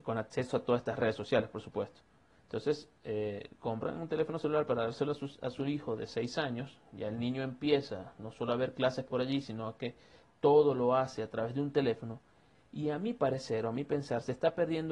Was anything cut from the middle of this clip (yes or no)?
no